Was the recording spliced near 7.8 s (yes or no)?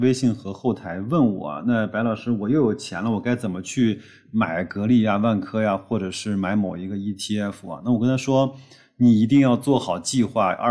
no